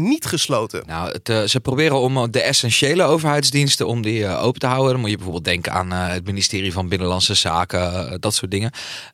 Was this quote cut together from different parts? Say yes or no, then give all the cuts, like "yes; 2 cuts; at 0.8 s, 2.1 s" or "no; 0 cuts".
no; 0 cuts